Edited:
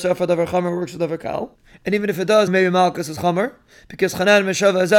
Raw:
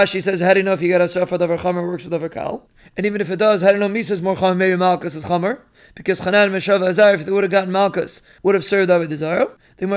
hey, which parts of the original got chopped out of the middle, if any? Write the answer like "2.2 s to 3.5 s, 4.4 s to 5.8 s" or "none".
3.6 s to 4.5 s